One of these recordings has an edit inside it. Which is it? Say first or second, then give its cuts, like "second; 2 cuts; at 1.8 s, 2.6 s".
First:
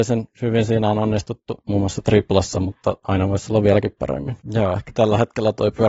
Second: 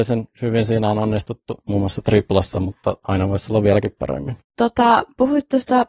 first; 1 cut; at 4.4 s